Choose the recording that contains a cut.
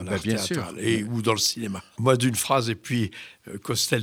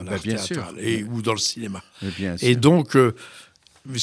first; 1 cut; at 1.9 s

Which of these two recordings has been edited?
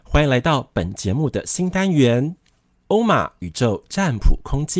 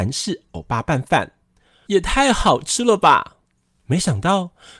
second; 2 cuts; at 1.9 s, 3.5 s

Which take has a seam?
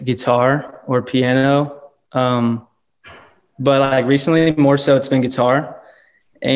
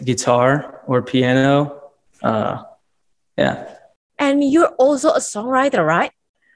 second; 2 cuts; at 2.1 s, 4.1 s

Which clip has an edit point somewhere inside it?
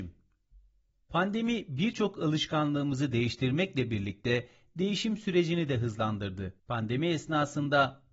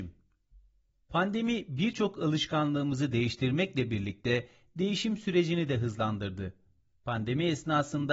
first; 1 cut; at 6.6 s

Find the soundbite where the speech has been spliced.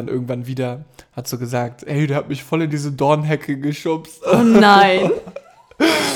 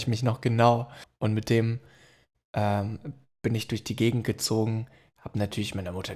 second; 1 cut; at 1.0 s

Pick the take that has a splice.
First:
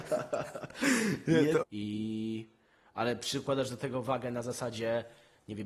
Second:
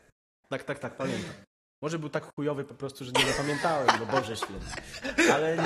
first; 1 cut; at 1.6 s

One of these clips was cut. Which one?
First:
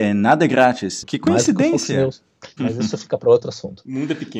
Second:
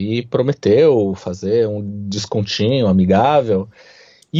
first; 2 cuts; at 1.0 s, 2.6 s

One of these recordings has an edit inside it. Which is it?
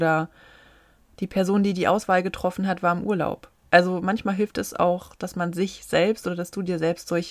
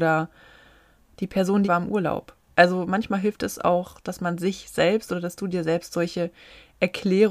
second; 1 cut; at 1.6 s

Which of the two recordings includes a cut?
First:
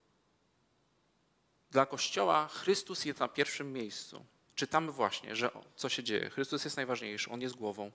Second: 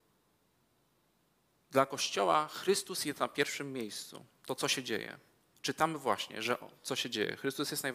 first; 1 cut; at 4.4 s

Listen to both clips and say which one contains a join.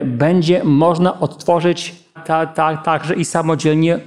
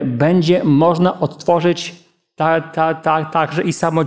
first; 1 cut; at 2.2 s

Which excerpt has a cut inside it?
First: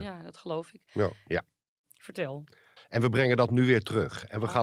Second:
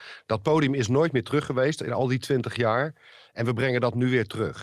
first; 2 cuts; at 1.3 s, 2.8 s

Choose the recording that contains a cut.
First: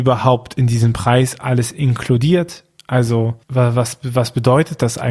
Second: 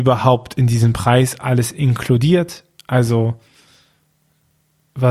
first; 1 cut; at 3.4 s

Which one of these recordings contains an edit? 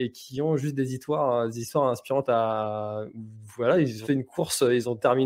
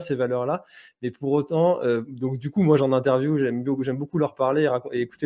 first; 1 cut; at 4.0 s

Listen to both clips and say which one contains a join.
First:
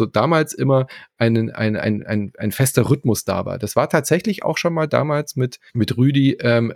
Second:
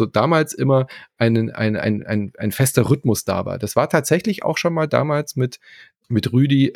first; 1 cut; at 5.7 s

